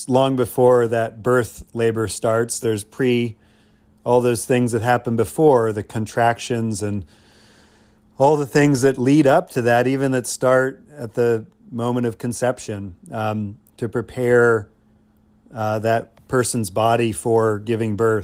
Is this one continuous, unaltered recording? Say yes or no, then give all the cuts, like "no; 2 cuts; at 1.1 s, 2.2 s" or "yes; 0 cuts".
yes; 0 cuts